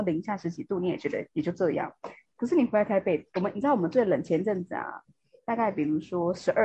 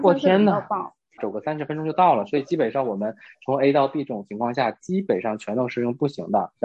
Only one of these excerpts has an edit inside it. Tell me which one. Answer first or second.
second